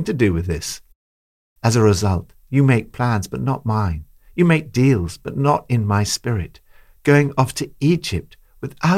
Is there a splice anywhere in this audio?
no; 0 cuts

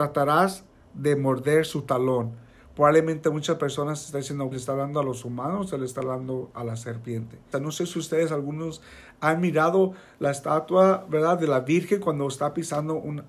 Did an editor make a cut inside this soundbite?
yes; 2 cuts; at 4.5 s, 7.5 s

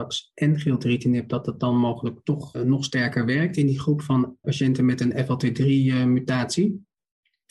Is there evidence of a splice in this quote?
yes; 2 cuts; at 2.5 s, 4.4 s

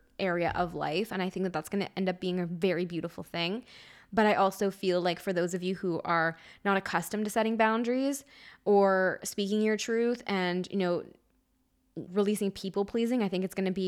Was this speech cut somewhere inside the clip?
yes; 1 cut; at 12.1 s

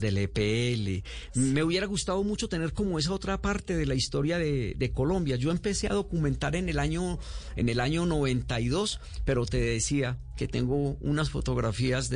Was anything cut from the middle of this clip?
no; 0 cuts

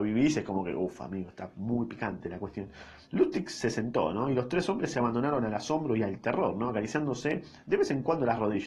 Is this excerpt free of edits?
no; 1 cut; at 3.0 s

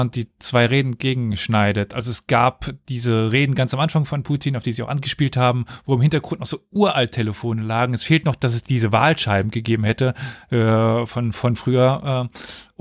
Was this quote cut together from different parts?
no; 0 cuts

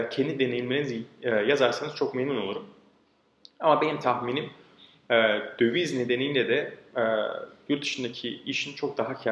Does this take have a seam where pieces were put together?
no; 0 cuts

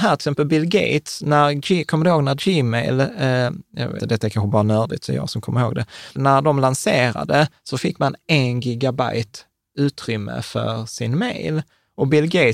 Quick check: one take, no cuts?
no; 2 cuts; at 4.0 s, 6.2 s

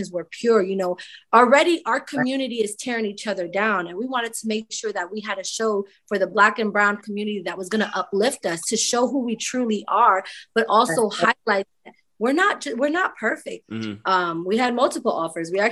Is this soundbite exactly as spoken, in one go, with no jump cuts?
no; 1 cut; at 13.6 s

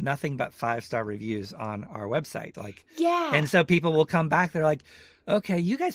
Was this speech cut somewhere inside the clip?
yes; 1 cut; at 2.5 s

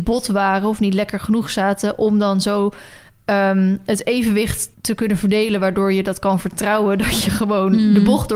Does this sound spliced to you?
yes; 1 cut; at 4.7 s

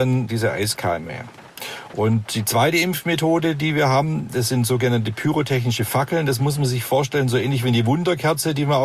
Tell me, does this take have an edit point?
no; 0 cuts

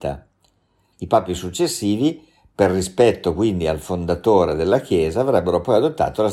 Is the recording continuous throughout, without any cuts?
no; 1 cut; at 0.9 s

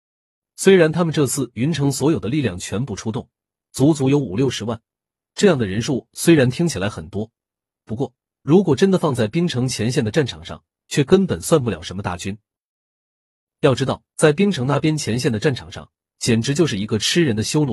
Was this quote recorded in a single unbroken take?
yes; 0 cuts

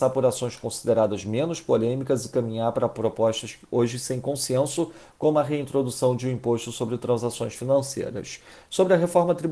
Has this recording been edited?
no; 0 cuts

